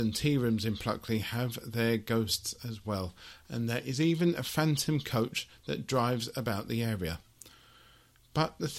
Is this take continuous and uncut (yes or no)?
yes